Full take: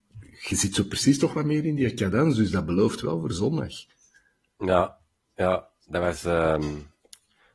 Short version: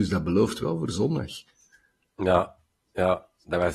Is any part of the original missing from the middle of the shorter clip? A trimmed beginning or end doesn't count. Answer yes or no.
no